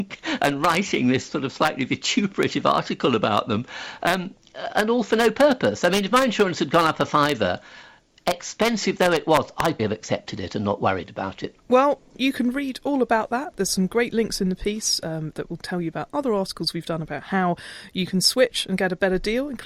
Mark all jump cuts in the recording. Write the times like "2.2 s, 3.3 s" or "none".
9.8 s, 11.6 s